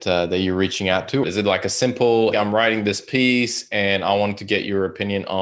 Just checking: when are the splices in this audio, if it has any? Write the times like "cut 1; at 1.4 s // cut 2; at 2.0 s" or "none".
cut 1; at 1.2 s // cut 2; at 2.3 s